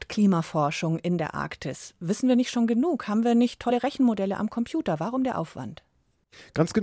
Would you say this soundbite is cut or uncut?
uncut